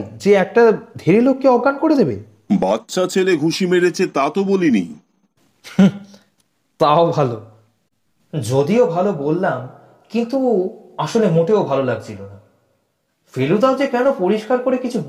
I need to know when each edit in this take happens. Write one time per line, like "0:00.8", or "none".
none